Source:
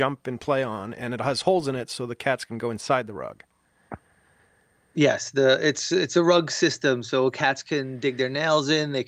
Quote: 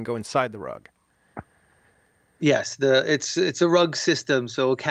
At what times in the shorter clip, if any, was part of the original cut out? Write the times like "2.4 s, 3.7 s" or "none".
none

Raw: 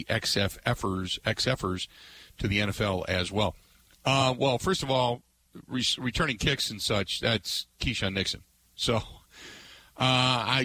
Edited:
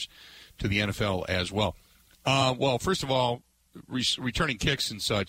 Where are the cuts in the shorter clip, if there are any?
none

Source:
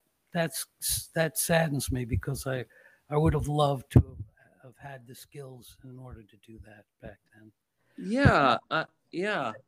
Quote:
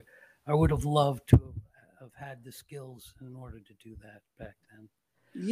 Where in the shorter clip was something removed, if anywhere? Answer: none

